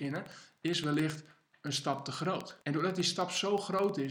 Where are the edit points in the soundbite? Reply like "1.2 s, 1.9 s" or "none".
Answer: 2.6 s

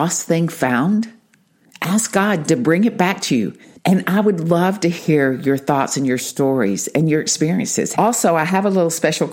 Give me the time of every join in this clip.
3.8 s, 7.9 s

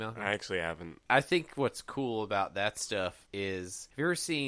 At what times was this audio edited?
1.1 s

